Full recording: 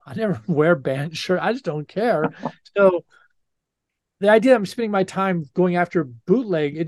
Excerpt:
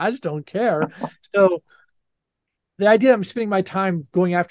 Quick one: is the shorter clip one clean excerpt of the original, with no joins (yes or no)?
yes